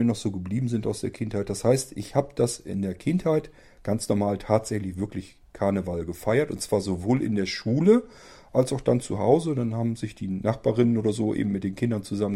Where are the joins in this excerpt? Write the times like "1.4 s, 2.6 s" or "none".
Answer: none